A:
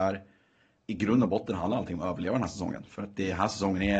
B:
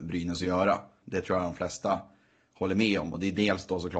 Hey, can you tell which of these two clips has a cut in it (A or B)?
B